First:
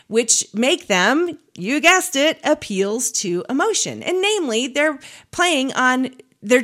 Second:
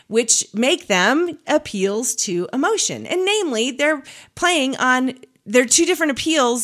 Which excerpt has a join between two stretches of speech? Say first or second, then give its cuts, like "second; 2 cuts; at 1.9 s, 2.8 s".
second; 1 cut; at 1.4 s